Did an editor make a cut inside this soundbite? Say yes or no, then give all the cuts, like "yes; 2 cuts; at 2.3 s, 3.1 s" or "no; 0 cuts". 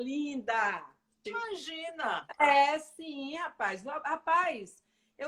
yes; 1 cut; at 1.3 s